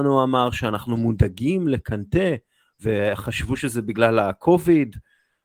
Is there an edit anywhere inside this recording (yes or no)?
no